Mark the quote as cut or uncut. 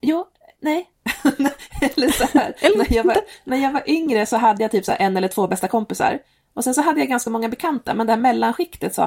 uncut